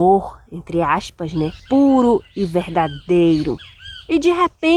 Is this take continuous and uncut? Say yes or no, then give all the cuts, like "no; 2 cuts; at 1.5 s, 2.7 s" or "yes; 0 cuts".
no; 1 cut; at 1.6 s